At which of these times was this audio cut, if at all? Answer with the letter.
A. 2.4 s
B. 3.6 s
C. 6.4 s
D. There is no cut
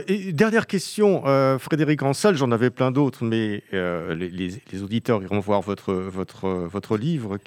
D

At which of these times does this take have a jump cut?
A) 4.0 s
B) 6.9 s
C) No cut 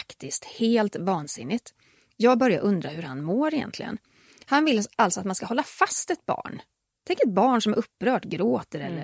C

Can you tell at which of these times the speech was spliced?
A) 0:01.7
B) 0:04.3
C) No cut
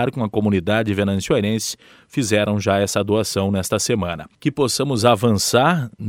B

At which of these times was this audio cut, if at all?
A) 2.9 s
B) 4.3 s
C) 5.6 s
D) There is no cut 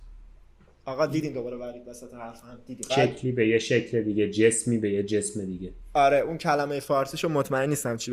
A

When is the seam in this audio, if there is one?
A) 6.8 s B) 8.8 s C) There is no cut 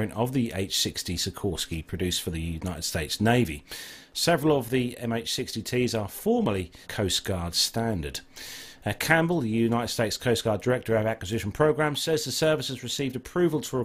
A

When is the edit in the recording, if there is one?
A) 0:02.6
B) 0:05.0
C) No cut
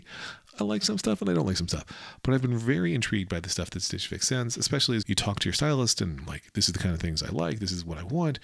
B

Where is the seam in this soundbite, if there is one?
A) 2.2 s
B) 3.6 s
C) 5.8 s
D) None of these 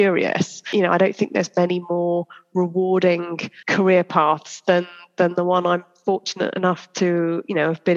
B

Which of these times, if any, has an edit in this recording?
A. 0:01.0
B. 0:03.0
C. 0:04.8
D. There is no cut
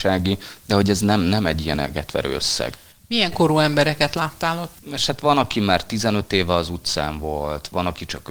C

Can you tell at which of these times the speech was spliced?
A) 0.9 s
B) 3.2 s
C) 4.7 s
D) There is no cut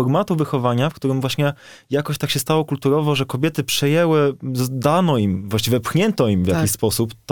D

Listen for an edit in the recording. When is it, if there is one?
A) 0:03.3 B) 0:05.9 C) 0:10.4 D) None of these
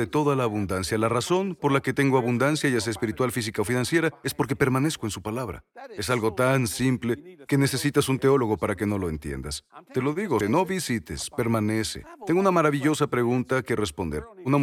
C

